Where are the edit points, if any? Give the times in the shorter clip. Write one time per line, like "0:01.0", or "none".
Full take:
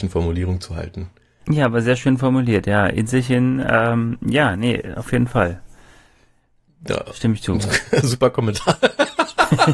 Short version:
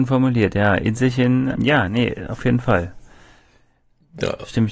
0:01.5